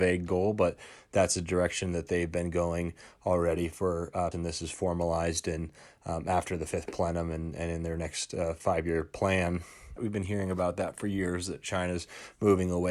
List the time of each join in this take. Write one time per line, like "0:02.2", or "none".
0:04.3
0:10.0